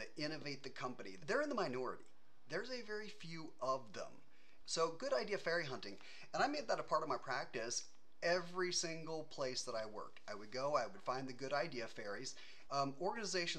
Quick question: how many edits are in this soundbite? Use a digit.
3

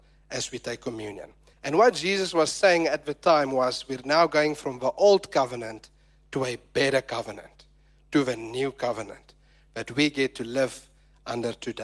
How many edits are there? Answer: 1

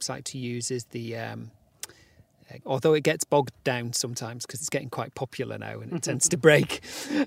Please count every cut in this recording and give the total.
1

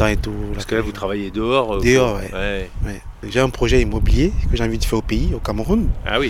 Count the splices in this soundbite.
0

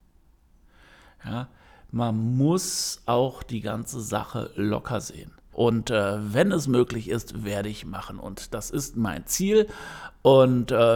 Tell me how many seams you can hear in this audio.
1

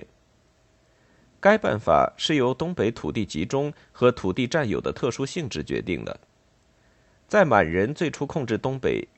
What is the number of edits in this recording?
0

